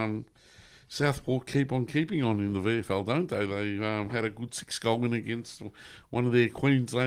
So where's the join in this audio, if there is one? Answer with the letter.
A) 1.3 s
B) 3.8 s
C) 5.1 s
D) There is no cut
D